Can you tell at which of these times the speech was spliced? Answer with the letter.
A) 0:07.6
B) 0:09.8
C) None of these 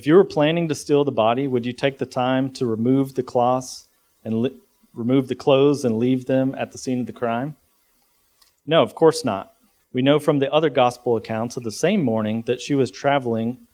B